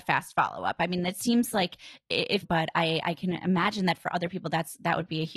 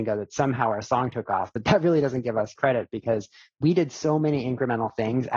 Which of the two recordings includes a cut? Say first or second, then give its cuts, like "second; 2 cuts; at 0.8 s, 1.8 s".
first; 1 cut; at 2.4 s